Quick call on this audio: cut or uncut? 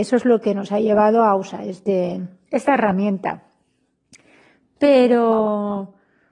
uncut